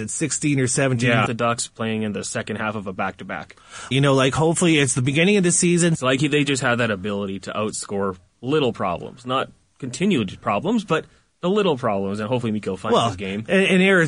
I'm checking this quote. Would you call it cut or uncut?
cut